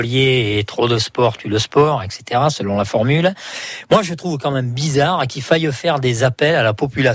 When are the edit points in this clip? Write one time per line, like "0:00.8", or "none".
none